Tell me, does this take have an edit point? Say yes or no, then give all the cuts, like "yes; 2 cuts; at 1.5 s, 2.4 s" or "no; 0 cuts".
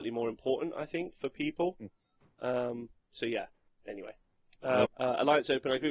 yes; 1 cut; at 4.8 s